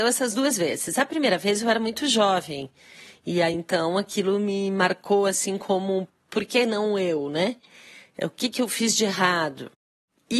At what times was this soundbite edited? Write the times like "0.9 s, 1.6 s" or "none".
none

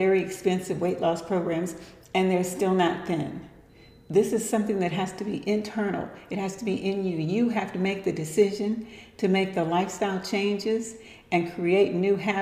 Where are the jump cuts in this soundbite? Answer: none

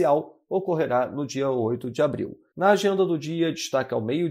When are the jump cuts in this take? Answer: 2.5 s

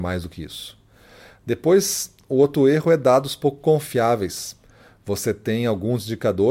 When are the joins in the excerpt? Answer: none

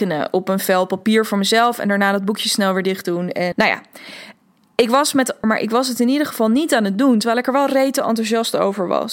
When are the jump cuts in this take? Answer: 3.5 s, 5.4 s

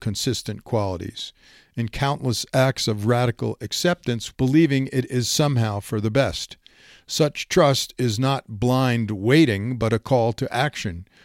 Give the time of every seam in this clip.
4.3 s

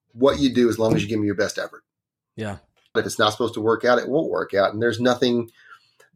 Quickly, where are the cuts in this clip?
3.0 s

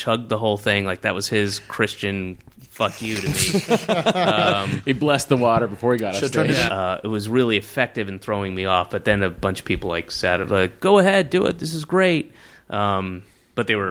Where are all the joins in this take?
6.7 s

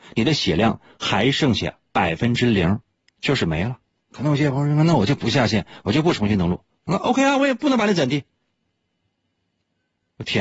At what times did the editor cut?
3.9 s

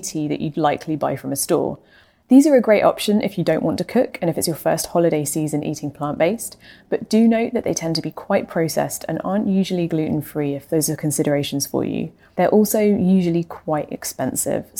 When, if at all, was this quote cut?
none

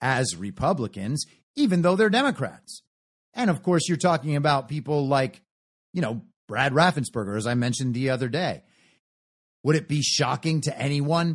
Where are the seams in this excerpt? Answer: none

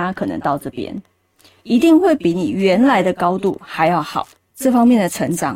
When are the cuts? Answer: 4.4 s

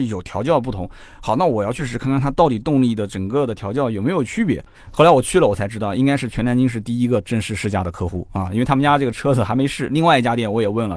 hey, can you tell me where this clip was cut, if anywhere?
1.8 s, 4.7 s

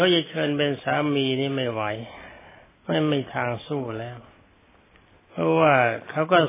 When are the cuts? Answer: none

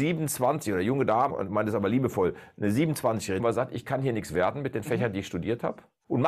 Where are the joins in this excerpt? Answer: 1.3 s, 3.4 s

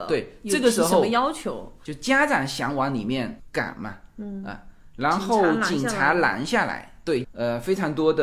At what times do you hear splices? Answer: 1.9 s, 7.2 s

